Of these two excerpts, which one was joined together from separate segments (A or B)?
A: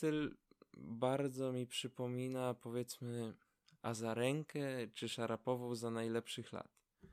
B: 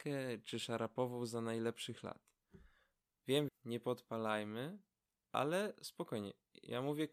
B